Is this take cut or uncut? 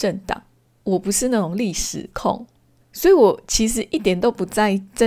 uncut